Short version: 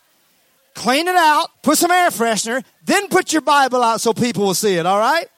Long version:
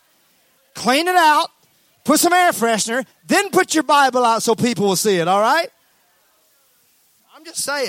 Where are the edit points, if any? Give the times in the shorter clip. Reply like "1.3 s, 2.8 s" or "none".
1.5 s